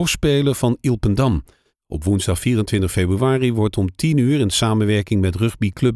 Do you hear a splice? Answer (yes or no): yes